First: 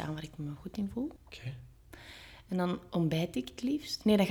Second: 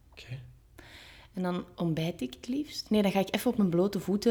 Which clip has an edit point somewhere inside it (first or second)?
first